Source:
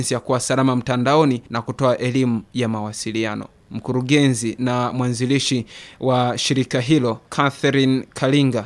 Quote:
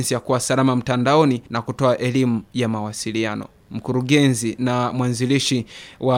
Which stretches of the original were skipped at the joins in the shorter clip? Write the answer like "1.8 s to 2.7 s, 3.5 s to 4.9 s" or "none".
none